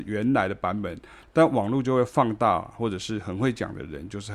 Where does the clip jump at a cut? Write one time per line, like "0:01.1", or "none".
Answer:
0:01.2

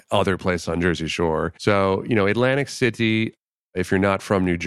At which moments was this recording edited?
0:01.6

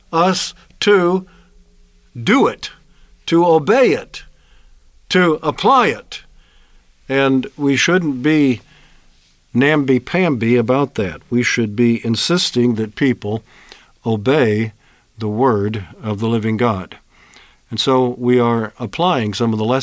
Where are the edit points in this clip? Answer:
none

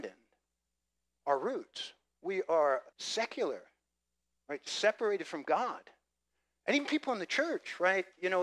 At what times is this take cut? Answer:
0:02.9

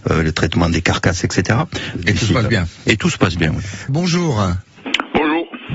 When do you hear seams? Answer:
0:02.0
0:03.9

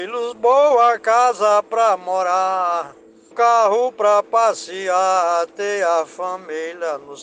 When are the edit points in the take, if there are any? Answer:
0:03.3

